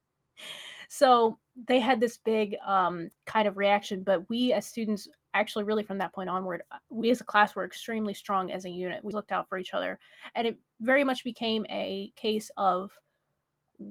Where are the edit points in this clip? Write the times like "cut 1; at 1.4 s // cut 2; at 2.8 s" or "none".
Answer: cut 1; at 3.2 s // cut 2; at 9.1 s